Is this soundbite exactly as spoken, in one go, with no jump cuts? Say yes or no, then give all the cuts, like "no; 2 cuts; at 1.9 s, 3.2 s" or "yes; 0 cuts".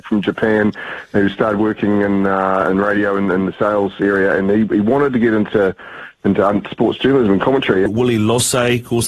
no; 1 cut; at 7.9 s